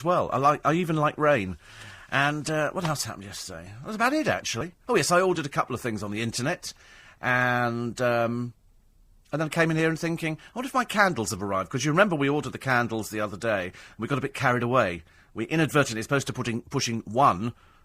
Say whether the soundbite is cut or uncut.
uncut